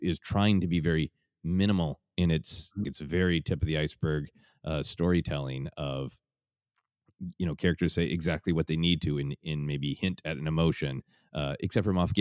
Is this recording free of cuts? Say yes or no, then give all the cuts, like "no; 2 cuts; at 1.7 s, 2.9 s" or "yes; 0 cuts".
no; 1 cut; at 2.8 s